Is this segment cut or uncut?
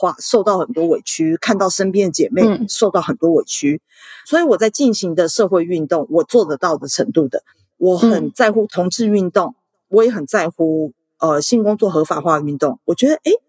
uncut